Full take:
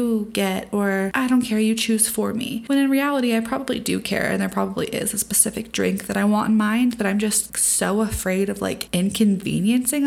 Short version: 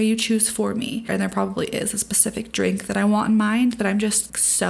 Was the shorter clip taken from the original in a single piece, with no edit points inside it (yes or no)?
no